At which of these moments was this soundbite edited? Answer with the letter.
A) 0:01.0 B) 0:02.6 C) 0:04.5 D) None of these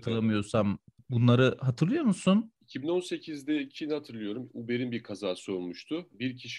B